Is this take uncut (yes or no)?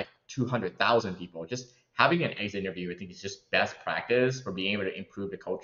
yes